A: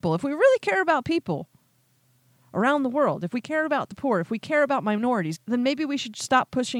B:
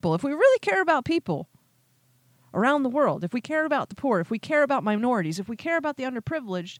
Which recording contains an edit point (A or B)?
A